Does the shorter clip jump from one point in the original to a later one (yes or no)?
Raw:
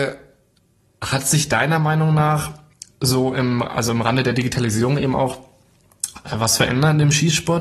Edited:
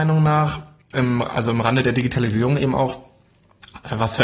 yes